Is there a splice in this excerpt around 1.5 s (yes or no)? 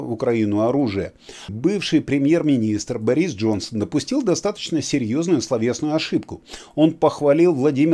yes